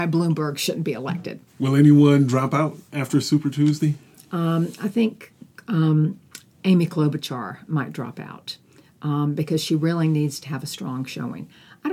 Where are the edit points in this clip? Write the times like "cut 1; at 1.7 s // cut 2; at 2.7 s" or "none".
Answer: cut 1; at 1.5 s